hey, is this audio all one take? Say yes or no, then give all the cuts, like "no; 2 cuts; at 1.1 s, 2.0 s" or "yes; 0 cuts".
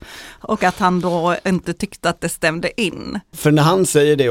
no; 1 cut; at 3.3 s